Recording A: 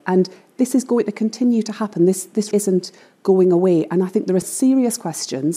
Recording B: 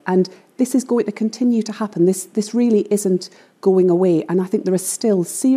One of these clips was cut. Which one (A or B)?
A